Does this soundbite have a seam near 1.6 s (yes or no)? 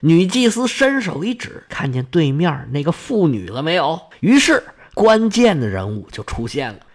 no